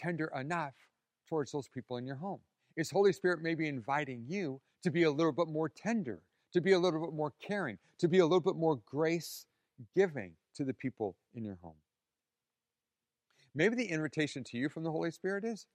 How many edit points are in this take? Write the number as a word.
zero